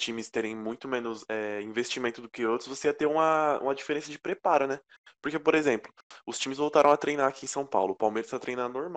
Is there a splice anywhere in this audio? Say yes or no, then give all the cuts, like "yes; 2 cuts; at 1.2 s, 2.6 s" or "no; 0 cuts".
no; 0 cuts